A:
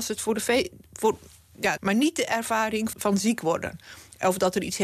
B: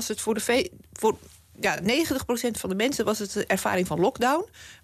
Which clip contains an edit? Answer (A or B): A